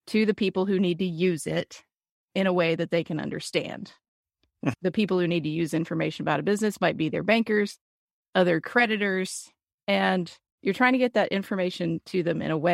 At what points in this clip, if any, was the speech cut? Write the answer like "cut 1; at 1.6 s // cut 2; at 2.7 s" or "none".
cut 1; at 4.7 s // cut 2; at 8.2 s